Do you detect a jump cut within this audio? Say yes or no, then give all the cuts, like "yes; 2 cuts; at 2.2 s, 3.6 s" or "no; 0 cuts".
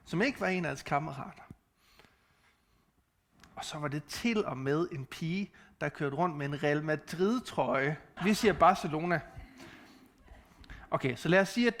yes; 1 cut; at 8.2 s